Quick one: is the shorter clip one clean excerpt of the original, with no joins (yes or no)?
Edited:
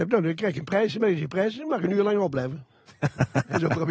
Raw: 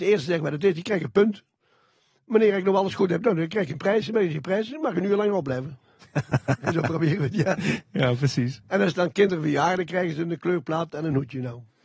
yes